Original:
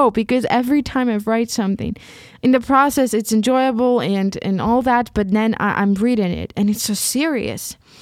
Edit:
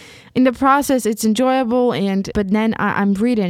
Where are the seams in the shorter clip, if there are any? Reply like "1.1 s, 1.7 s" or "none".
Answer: 2.3 s